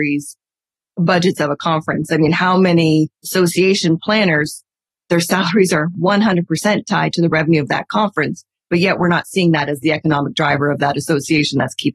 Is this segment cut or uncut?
uncut